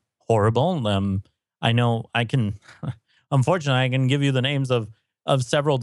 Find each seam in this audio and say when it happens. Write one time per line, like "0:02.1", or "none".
none